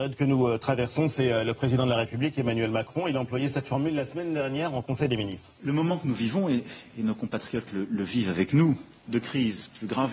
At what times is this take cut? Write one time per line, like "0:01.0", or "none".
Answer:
0:05.5
0:09.1